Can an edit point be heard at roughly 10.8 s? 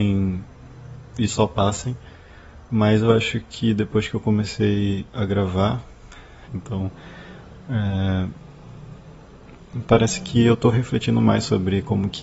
no; 1 cut; at 6.5 s

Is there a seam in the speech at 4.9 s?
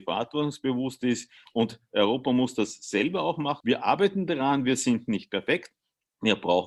no; 2 cuts; at 1.5 s, 3.6 s

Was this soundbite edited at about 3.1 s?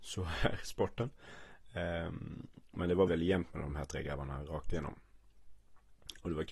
yes; 1 cut; at 3.1 s

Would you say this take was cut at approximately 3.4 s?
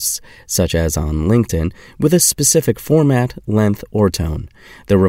no; 0 cuts

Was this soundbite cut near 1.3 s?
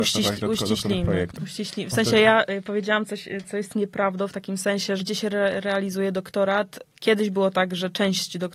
yes; 2 cuts; at 1.3 s, 5.0 s

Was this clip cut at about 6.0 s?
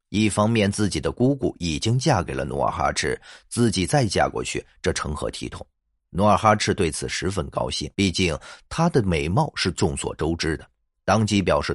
yes; 2 cuts; at 6.0 s, 7.9 s

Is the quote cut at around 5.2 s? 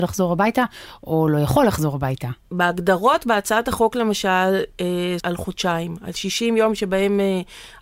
yes; 2 cuts; at 2.4 s, 5.2 s

